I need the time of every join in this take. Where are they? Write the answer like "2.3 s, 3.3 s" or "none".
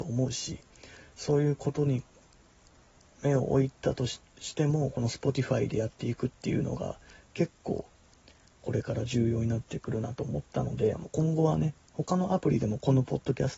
none